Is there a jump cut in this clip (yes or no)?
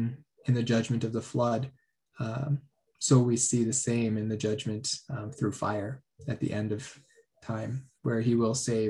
no